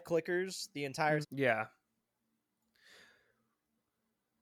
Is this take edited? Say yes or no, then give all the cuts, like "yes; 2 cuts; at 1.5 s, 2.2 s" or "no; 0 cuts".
yes; 1 cut; at 1.2 s